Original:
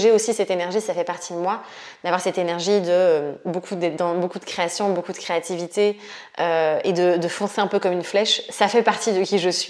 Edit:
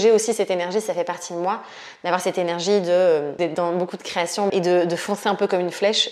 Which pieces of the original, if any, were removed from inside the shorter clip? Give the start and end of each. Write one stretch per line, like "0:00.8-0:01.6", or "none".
0:03.4-0:03.8
0:04.9-0:06.8